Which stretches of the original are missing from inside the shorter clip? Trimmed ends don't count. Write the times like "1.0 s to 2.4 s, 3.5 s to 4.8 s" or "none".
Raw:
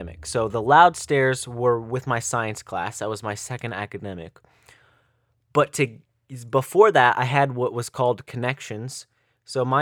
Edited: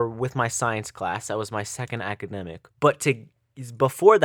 4.4 s to 5.4 s